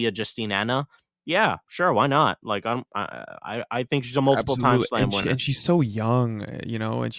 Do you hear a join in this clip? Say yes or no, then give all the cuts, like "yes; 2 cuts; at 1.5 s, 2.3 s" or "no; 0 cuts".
no; 0 cuts